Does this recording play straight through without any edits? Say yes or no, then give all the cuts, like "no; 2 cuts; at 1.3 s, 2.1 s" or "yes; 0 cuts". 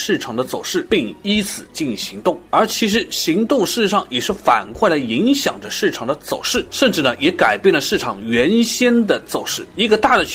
no; 1 cut; at 2.0 s